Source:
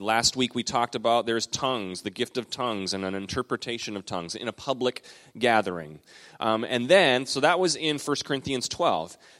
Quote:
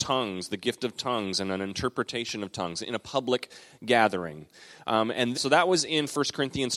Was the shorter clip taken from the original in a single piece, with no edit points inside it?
no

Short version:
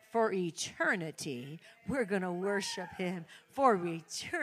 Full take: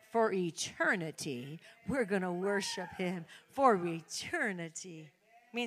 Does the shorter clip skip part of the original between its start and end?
no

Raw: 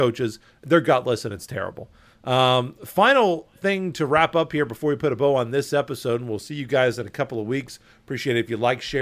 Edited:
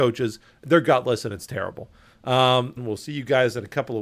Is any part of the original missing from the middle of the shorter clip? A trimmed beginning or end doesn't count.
yes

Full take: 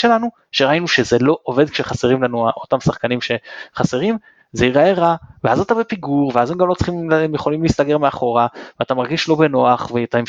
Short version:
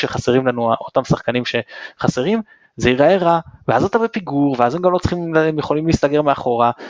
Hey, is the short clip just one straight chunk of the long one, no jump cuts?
yes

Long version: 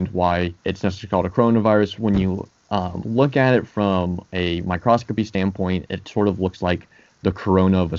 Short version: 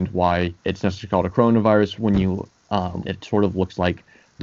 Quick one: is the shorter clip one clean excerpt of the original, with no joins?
no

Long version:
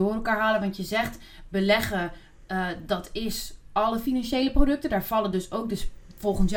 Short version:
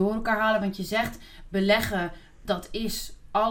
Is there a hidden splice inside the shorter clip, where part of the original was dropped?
yes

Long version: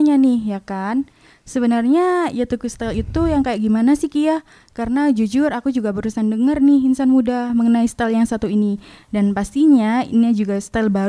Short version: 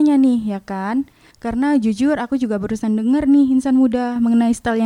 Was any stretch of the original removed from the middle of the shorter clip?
yes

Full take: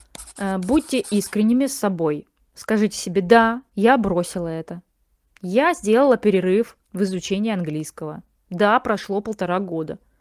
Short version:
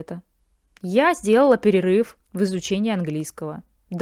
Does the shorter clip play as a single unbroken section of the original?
yes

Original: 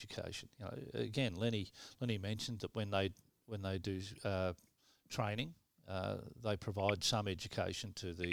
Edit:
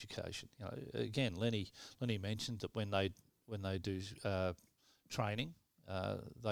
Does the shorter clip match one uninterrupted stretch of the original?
yes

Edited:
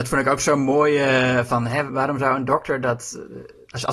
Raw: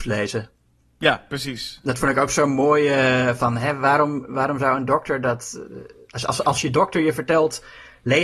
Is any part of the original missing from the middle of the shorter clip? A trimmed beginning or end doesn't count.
yes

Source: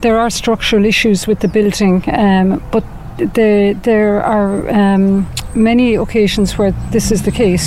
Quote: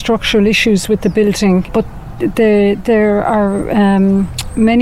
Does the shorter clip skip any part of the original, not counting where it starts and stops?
yes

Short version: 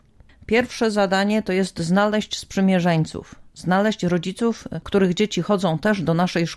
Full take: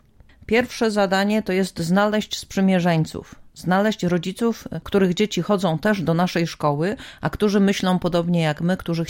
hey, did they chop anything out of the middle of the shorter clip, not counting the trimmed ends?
no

